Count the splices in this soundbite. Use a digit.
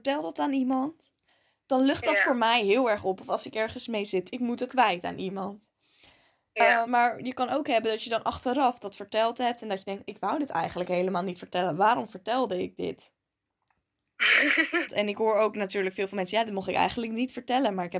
3